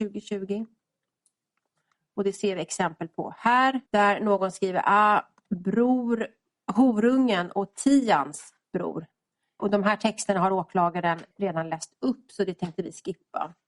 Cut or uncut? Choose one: cut